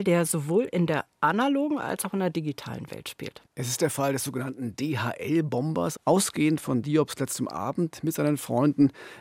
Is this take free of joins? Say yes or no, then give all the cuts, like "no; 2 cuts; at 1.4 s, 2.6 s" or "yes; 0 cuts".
no; 2 cuts; at 3.5 s, 6.0 s